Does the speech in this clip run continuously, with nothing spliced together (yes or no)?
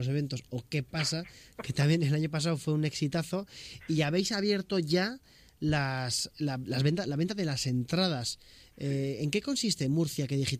no